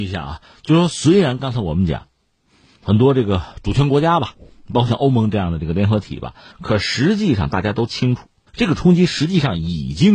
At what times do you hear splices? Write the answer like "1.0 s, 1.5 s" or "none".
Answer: 6.5 s, 8.5 s